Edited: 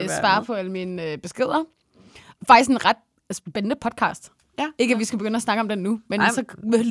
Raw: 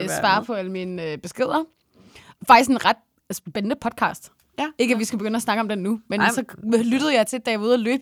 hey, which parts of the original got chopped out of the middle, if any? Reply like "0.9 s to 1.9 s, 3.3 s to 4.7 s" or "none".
none